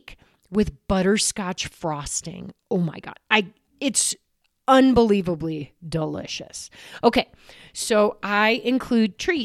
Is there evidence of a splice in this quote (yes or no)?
no